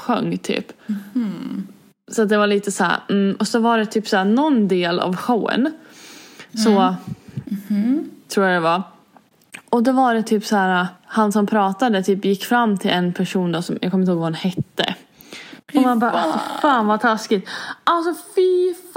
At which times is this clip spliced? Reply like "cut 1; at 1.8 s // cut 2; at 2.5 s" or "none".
cut 1; at 7.4 s // cut 2; at 15.6 s

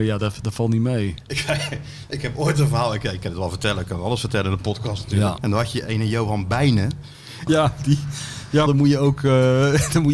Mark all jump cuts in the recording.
cut 1; at 5.4 s // cut 2; at 7.5 s // cut 3; at 8.7 s

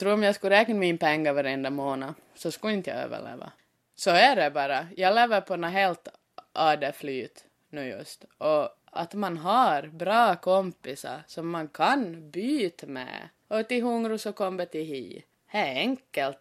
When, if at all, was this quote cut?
cut 1; at 13.4 s

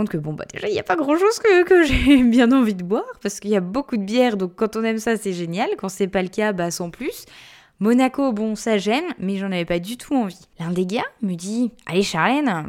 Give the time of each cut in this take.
cut 1; at 10.5 s

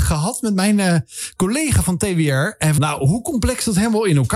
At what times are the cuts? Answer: cut 1; at 2.8 s

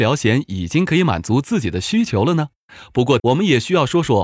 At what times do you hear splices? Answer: cut 1; at 3.2 s

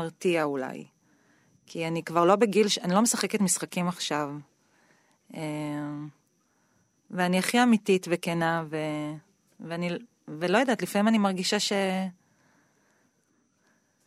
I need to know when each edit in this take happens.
none

